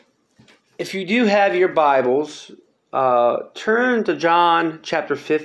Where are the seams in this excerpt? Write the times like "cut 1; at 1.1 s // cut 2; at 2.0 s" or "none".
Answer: none